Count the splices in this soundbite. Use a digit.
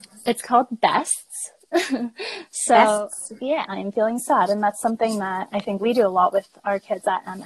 1